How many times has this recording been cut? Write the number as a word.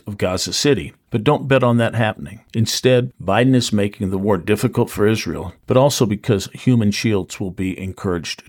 two